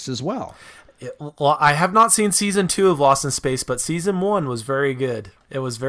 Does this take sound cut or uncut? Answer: uncut